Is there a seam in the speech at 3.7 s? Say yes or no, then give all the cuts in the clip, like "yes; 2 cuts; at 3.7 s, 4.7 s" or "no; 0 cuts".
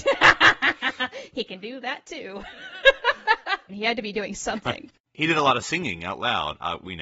yes; 1 cut; at 3.7 s